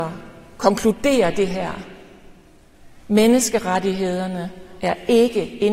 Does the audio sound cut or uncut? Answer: uncut